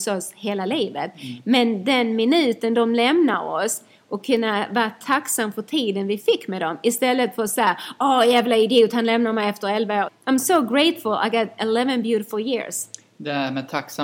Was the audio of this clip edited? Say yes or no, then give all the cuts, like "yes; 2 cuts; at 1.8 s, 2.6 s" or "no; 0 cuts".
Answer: yes; 1 cut; at 10.1 s